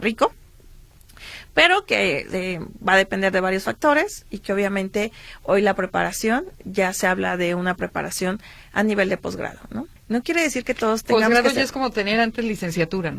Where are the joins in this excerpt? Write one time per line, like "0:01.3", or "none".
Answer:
0:10.0